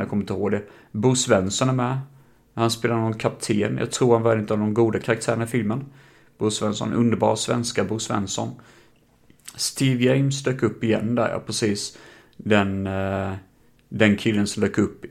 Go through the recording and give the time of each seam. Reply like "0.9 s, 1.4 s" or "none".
none